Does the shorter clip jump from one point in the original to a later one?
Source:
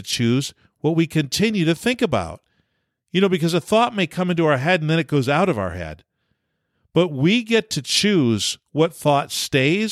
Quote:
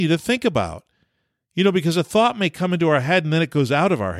no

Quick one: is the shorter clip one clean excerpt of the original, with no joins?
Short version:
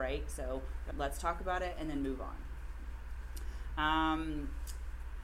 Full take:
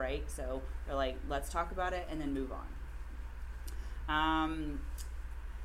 no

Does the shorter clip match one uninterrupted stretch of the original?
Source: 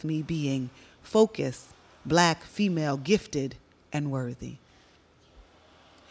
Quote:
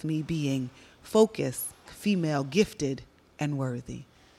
no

